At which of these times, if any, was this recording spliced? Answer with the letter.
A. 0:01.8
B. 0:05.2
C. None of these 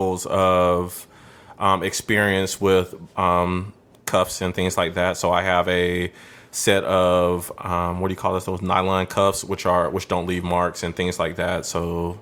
C